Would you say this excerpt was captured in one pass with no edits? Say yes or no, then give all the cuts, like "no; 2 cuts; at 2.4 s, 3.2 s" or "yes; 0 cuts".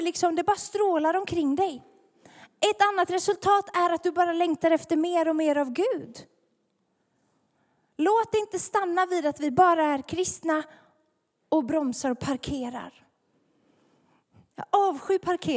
yes; 0 cuts